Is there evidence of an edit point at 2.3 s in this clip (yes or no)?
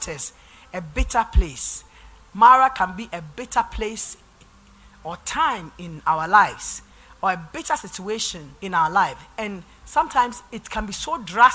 no